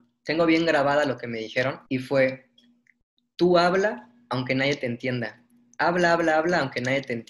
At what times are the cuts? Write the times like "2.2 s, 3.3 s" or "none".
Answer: 1.9 s